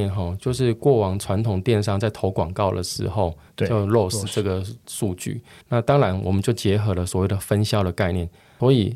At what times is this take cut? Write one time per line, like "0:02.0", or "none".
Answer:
0:03.5
0:05.6